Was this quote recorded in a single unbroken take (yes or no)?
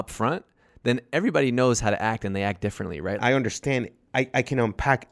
no